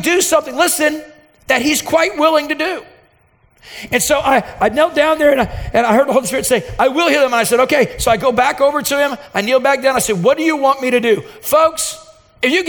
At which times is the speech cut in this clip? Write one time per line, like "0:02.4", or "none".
none